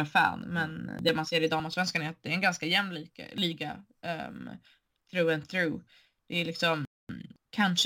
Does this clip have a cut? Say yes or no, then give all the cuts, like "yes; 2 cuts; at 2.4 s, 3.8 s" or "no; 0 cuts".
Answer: no; 0 cuts